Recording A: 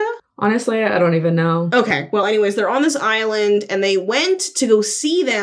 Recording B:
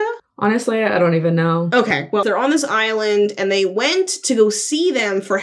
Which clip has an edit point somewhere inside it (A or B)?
B